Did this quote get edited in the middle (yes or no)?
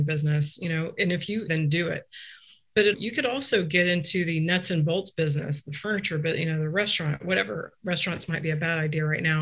yes